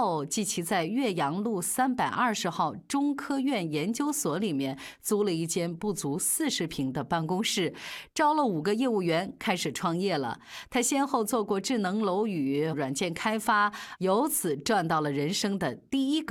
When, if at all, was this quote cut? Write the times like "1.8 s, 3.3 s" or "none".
12.7 s